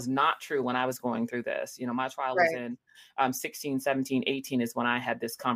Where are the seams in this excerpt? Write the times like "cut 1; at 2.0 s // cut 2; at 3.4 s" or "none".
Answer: none